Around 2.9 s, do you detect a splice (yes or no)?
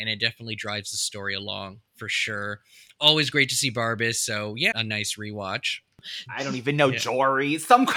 no